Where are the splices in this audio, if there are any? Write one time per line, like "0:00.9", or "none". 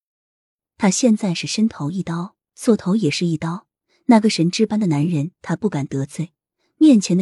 none